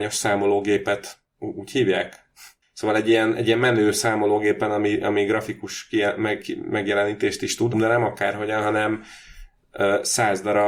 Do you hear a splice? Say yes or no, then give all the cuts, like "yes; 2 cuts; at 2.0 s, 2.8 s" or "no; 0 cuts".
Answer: yes; 1 cut; at 7.7 s